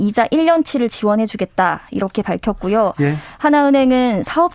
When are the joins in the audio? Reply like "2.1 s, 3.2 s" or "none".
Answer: none